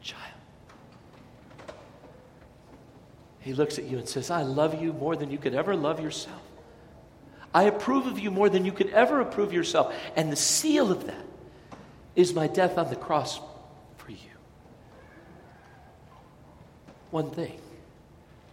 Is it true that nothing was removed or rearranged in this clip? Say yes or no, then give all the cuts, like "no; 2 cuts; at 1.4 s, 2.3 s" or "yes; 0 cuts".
yes; 0 cuts